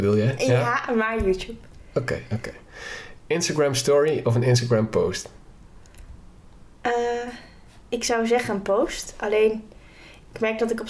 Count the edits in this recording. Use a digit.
0